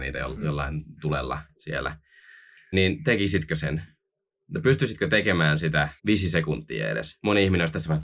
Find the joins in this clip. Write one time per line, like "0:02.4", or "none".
0:02.7
0:06.0